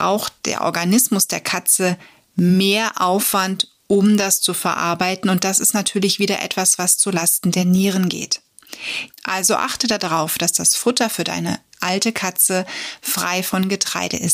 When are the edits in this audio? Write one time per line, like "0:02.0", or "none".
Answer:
0:09.1